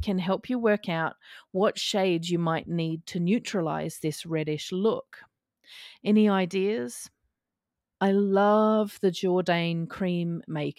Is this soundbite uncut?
no; 1 cut; at 7.9 s

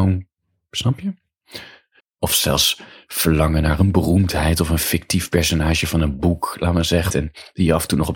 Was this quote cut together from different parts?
yes; 2 cuts; at 2.0 s, 7.1 s

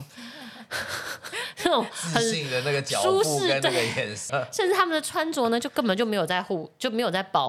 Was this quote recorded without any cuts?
no; 1 cut; at 4.3 s

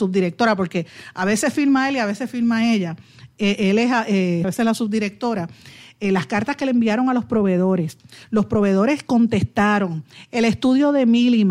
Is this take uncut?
no; 1 cut; at 4.4 s

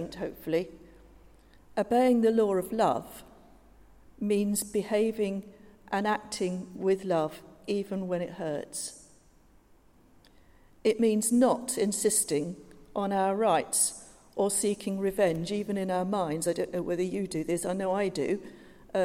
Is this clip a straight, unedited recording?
yes; 0 cuts

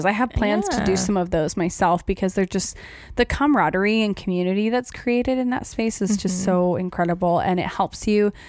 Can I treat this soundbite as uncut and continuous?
yes; 0 cuts

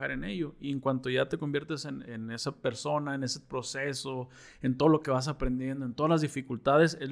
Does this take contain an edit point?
yes; 1 cut; at 2.1 s

